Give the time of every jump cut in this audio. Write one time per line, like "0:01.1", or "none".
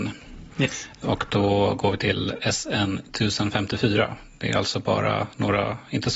none